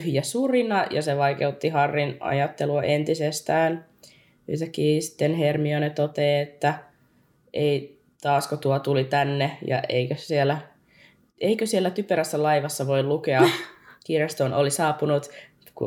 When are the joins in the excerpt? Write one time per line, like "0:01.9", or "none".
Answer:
none